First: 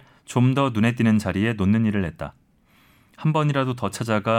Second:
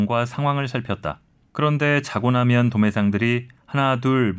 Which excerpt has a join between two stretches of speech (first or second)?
second